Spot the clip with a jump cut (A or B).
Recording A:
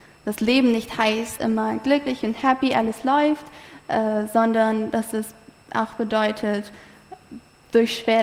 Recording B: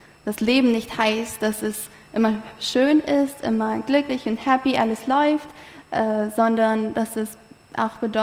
A